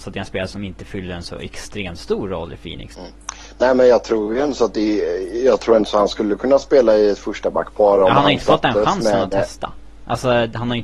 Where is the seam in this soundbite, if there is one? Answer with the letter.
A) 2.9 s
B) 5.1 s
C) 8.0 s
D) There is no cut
A